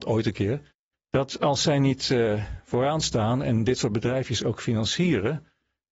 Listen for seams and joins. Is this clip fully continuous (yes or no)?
no